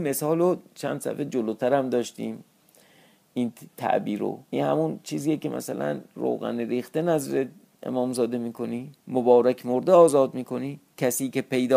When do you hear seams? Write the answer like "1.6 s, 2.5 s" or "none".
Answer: 4.4 s, 9.0 s